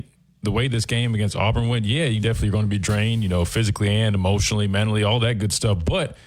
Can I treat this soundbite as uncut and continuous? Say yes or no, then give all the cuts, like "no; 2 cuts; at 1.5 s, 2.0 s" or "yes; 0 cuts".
yes; 0 cuts